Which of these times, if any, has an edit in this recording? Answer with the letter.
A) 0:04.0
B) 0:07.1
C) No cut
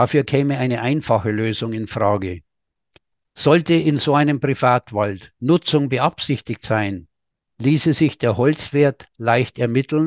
C